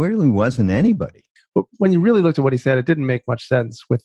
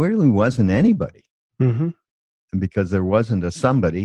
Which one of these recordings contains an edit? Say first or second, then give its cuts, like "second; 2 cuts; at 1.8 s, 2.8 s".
first; 1 cut; at 1.4 s